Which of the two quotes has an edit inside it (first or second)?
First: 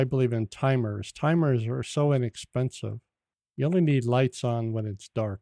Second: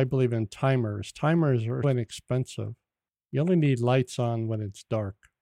second